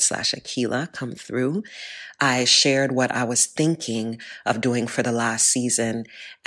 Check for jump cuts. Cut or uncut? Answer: uncut